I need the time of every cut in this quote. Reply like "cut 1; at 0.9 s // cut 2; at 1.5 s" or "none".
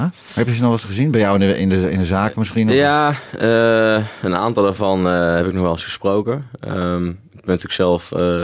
none